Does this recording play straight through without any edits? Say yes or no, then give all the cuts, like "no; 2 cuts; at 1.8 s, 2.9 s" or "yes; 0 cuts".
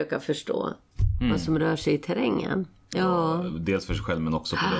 no; 1 cut; at 2.9 s